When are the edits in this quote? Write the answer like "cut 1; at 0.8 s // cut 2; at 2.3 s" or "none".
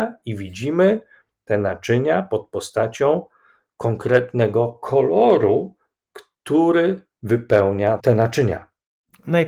cut 1; at 8.0 s